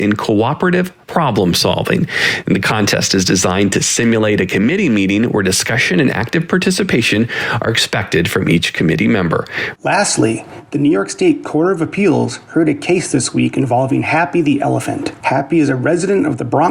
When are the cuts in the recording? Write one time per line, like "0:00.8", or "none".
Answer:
0:09.8

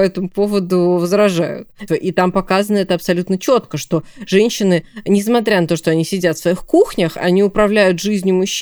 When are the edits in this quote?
0:01.9

